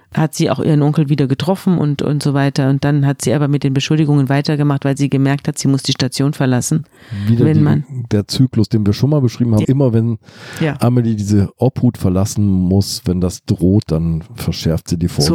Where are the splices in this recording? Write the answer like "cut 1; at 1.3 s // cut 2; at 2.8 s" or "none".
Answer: cut 1; at 9.6 s